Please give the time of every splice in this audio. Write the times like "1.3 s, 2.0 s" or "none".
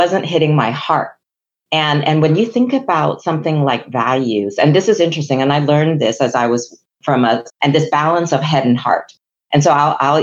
7.5 s